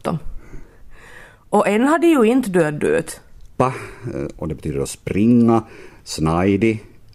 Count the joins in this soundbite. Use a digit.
2